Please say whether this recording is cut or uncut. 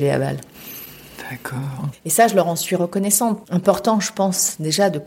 cut